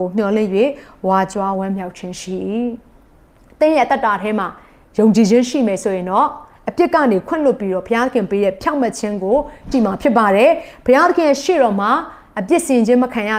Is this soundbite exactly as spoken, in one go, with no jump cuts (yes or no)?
no